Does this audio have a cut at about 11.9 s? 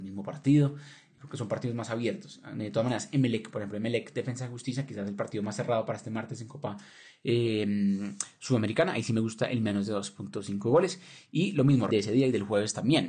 yes; 1 cut; at 11.9 s

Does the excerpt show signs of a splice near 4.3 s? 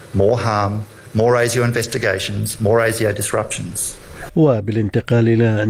yes; 1 cut; at 4.3 s

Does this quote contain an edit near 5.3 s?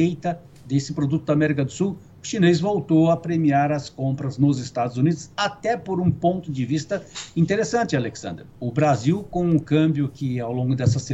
no; 1 cut; at 8.5 s

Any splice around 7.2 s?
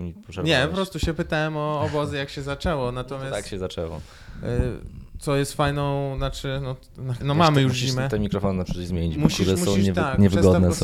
yes; 1 cut; at 7.2 s

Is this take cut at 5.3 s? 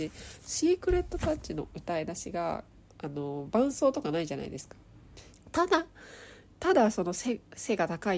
yes; 1 cut; at 5.3 s

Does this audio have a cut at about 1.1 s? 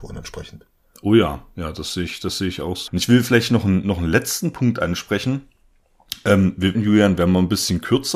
no; 2 cuts; at 2.9 s, 6.7 s

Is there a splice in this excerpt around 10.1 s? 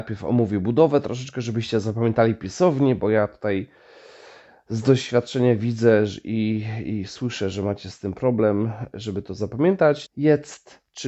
yes; 1 cut; at 10.1 s

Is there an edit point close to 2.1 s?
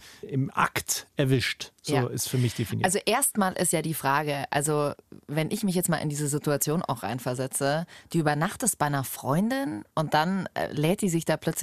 no; 0 cuts

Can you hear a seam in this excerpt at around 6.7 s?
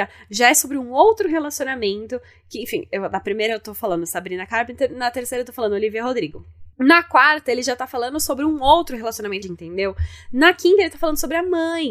yes; 2 cuts; at 6.7 s, 9.4 s

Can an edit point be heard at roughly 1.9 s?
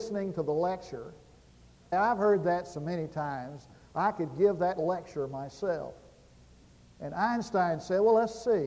yes; 1 cut; at 1.9 s

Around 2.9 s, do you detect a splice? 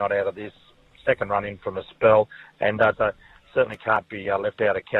yes; 1 cut; at 2.9 s

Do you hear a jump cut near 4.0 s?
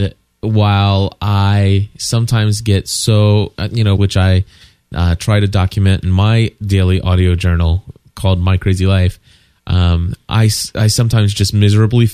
yes; 1 cut; at 4.0 s

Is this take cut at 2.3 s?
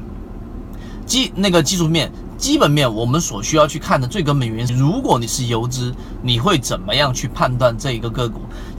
no; 1 cut; at 4.7 s

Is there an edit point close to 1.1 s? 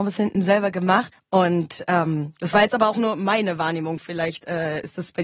yes; 1 cut; at 1.1 s

